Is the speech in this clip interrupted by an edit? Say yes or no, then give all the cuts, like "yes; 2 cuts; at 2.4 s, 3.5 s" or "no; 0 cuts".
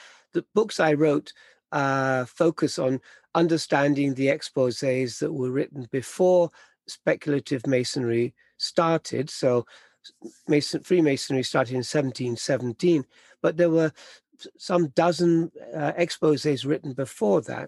no; 0 cuts